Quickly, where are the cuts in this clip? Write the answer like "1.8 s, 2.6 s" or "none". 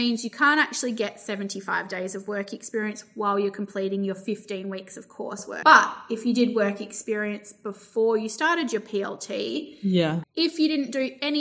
5.6 s, 10.2 s